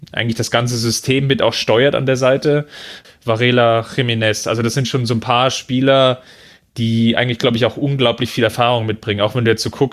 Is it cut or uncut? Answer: cut